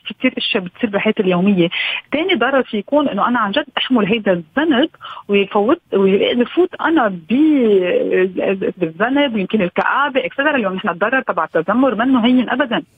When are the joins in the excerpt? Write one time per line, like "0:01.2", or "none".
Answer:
0:08.7